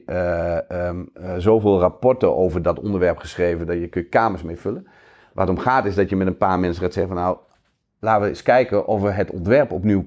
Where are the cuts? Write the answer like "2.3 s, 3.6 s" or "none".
none